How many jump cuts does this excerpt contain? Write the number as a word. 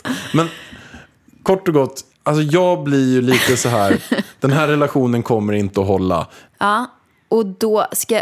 two